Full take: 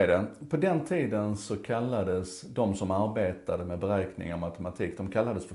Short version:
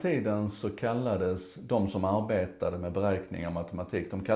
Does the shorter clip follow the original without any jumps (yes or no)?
yes